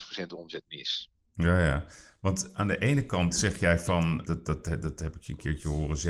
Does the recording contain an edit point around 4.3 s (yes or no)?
yes